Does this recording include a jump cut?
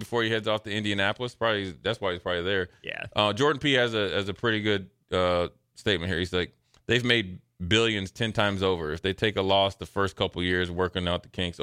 no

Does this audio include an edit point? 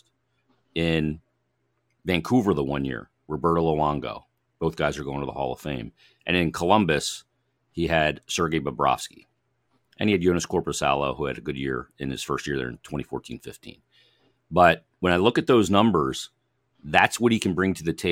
no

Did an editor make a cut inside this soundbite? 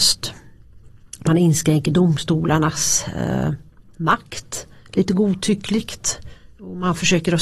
no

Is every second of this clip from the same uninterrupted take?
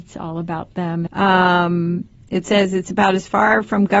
no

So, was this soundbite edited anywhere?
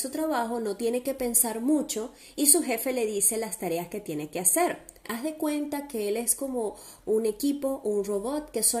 yes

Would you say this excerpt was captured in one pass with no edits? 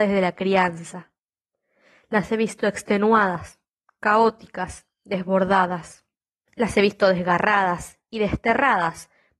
no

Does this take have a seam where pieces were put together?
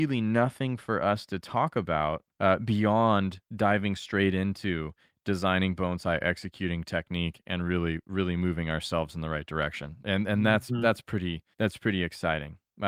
yes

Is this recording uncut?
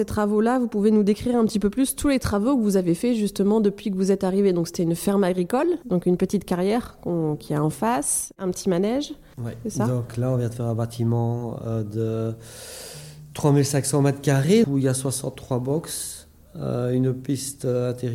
no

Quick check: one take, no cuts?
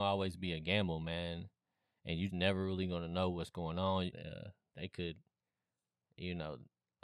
no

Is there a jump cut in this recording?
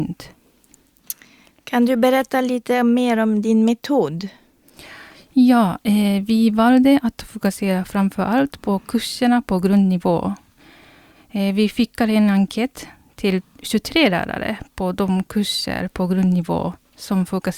no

